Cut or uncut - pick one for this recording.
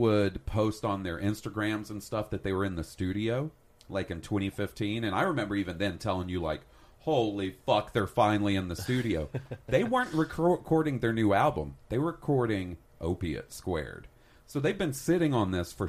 uncut